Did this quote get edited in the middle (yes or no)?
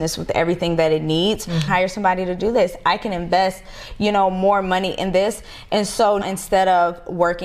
yes